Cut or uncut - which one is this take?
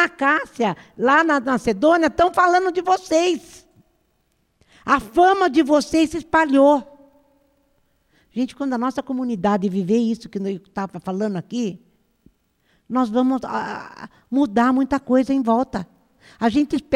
uncut